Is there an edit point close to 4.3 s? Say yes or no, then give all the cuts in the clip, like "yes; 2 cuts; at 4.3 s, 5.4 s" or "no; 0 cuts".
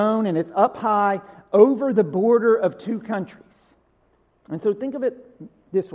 yes; 1 cut; at 4.3 s